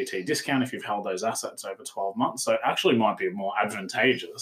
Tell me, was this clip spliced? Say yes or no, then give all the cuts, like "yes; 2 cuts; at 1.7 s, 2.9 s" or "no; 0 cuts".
no; 0 cuts